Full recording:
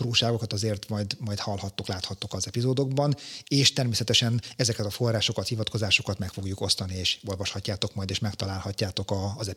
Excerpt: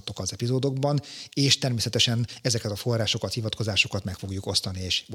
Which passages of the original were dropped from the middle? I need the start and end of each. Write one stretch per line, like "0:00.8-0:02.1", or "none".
none